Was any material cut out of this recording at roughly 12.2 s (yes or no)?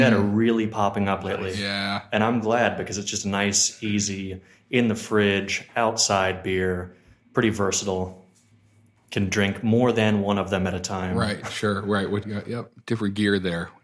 yes